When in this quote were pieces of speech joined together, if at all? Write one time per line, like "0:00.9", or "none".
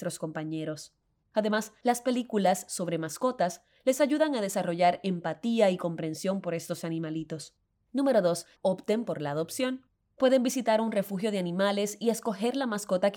0:01.2
0:08.6

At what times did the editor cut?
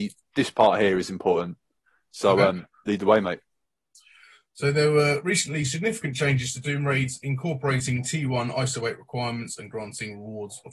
none

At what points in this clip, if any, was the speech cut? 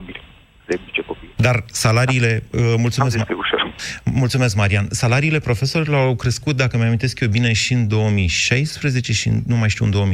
0:01.4

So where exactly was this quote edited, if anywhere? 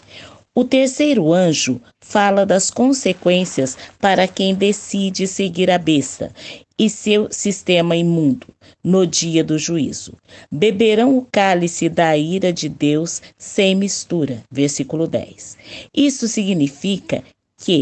none

